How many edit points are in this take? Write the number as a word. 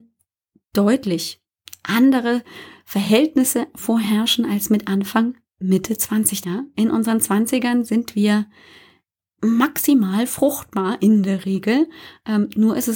one